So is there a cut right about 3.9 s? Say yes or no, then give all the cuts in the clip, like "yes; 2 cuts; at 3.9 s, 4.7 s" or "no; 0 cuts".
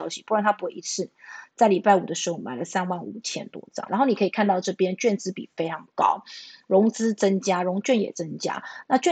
yes; 1 cut; at 3.9 s